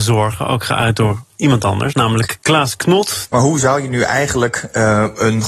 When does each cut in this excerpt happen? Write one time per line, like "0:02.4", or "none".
0:03.3